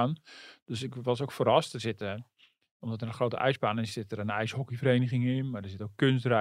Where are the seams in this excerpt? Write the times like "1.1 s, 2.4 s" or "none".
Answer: 3.9 s